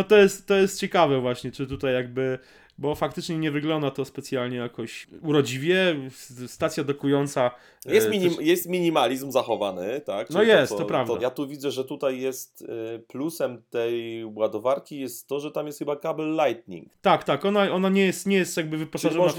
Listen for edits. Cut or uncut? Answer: cut